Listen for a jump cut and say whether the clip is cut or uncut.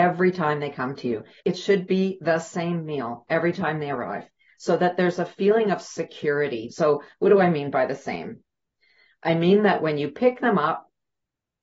cut